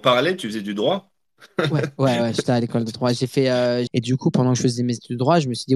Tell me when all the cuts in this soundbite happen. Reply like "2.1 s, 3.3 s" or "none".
3.9 s